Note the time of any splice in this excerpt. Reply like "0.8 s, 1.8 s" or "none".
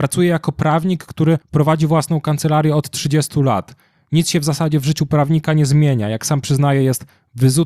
none